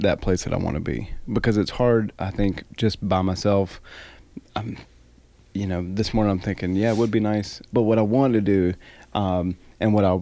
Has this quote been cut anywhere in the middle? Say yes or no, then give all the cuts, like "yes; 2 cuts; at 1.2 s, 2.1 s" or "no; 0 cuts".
yes; 1 cut; at 7.7 s